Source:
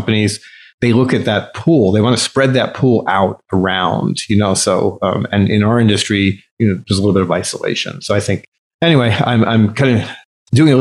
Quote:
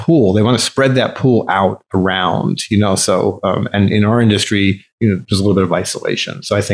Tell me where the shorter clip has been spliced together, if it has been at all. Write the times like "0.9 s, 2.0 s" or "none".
none